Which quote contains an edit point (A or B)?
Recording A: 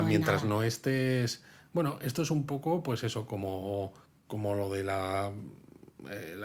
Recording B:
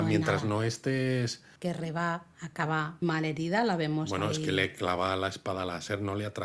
B